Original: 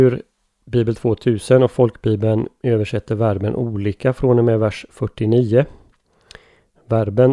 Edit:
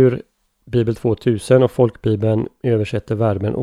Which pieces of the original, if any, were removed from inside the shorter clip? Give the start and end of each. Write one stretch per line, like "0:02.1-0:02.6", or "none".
none